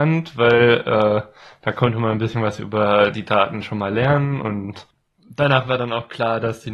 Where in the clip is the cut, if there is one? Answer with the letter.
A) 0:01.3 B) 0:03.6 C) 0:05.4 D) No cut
D